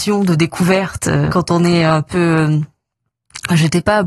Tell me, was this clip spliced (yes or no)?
yes